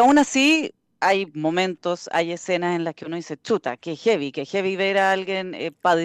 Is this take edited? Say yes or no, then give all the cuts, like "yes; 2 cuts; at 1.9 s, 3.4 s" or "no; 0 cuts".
no; 0 cuts